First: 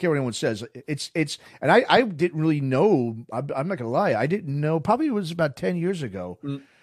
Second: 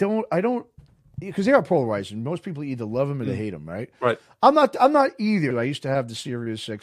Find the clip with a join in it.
second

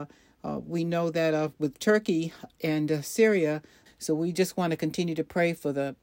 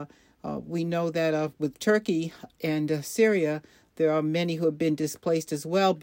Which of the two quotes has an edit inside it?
first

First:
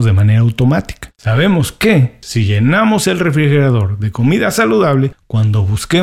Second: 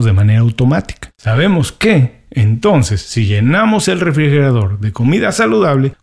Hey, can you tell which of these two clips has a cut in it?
first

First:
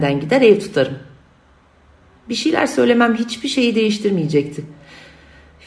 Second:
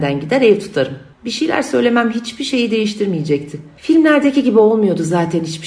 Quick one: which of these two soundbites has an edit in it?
second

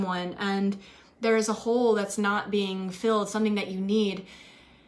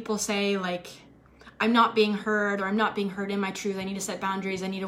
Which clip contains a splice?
second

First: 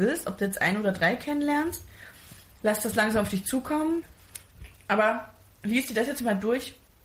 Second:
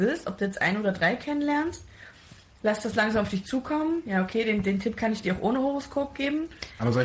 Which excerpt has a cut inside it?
first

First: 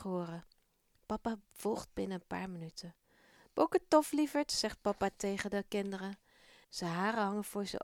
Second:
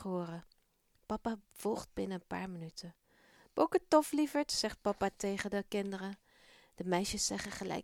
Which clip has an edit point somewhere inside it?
first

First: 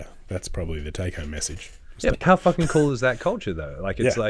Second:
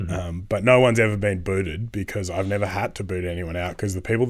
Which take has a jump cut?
first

